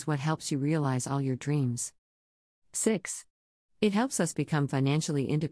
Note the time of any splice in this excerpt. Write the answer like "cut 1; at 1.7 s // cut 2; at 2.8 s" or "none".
cut 1; at 3.7 s